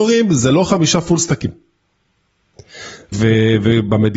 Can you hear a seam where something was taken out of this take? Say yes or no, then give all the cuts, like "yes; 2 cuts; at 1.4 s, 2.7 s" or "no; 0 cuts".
yes; 1 cut; at 3.1 s